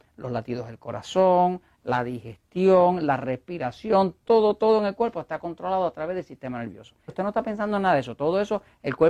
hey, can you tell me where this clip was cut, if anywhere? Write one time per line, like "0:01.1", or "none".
0:03.0
0:04.3
0:07.1

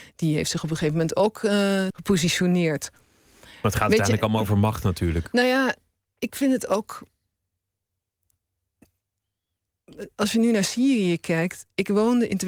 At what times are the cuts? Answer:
0:01.9

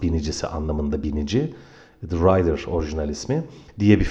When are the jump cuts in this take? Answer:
none

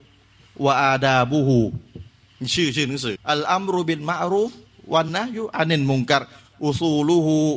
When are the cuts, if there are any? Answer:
0:03.2
0:05.1

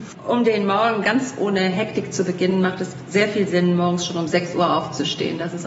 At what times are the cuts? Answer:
none

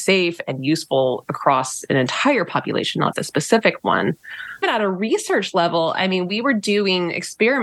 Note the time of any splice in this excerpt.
0:03.1
0:04.6

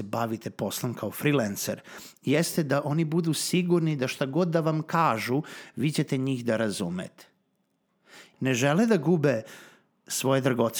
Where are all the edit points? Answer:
0:08.3

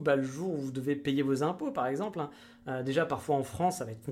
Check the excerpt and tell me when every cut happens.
none

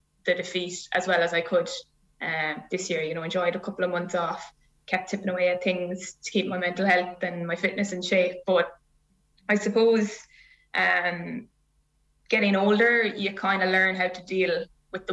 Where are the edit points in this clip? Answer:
0:08.4

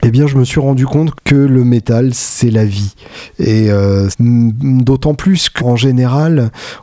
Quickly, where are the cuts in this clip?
0:01.2
0:04.1
0:05.6

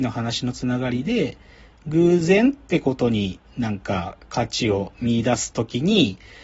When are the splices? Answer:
none

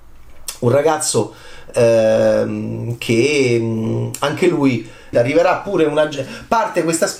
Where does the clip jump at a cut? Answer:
0:05.1

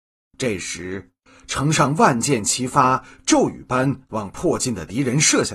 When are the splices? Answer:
none

